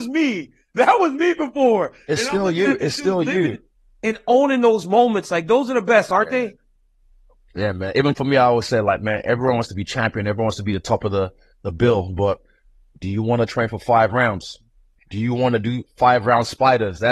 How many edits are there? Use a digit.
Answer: 0